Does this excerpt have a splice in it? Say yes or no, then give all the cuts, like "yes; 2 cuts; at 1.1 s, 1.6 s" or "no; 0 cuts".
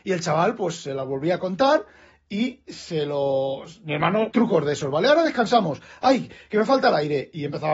yes; 1 cut; at 4.3 s